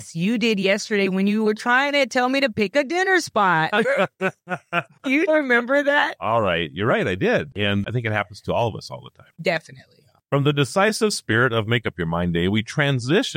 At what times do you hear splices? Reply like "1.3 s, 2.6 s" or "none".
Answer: 5.3 s